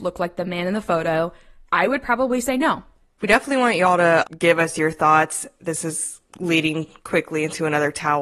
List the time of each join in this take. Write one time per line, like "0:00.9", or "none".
none